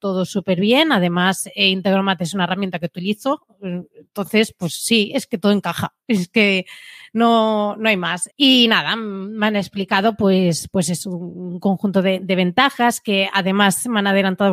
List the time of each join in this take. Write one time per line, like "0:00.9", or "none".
0:08.3